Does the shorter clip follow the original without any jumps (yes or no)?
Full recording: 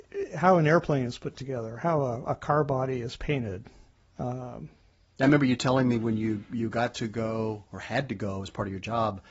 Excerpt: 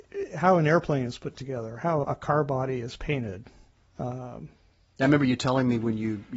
no